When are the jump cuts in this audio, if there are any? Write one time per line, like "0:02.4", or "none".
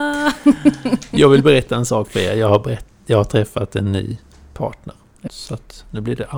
0:05.3